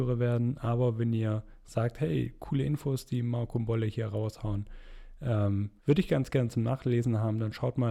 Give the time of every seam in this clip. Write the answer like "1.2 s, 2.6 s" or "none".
5.8 s